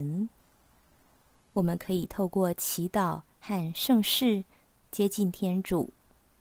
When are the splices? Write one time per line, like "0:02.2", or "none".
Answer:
0:01.4